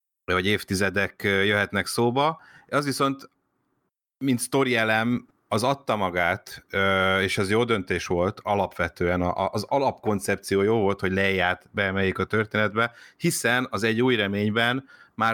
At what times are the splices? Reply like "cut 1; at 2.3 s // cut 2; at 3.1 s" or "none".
none